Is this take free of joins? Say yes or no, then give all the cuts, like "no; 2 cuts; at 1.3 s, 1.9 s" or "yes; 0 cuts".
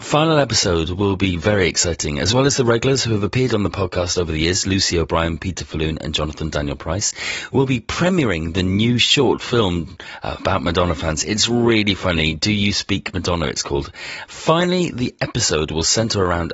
no; 1 cut; at 14.2 s